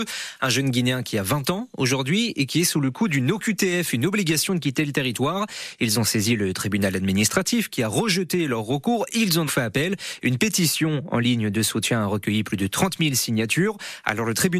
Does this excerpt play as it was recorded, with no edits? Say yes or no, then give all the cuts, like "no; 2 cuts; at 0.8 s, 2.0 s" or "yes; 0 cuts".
no; 1 cut; at 9.5 s